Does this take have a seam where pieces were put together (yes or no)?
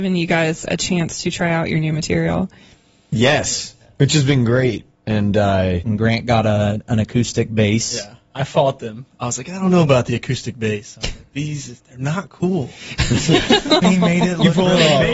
yes